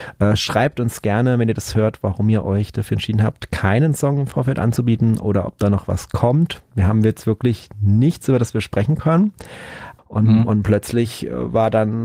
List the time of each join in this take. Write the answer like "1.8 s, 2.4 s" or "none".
10.0 s